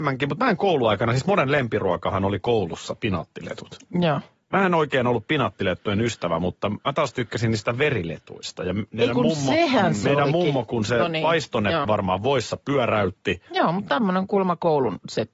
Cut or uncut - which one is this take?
cut